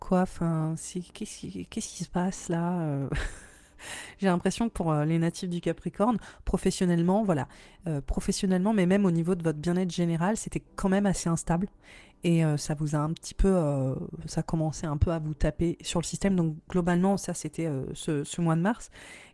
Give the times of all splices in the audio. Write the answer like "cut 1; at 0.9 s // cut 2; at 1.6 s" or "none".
none